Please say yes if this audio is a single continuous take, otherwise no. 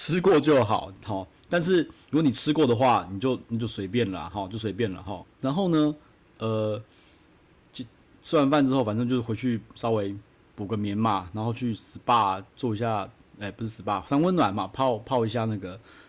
no